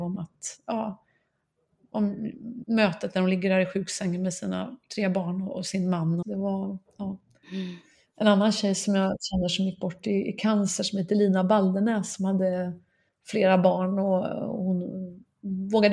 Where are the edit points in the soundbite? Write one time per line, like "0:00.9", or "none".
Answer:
0:02.6
0:06.2